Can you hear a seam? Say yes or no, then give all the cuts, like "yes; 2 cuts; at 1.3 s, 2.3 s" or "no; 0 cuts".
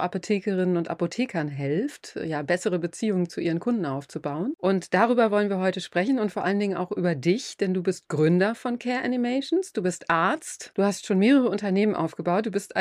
no; 0 cuts